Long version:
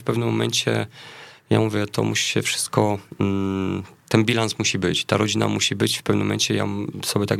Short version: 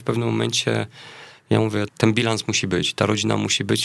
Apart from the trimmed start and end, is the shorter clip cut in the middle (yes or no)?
yes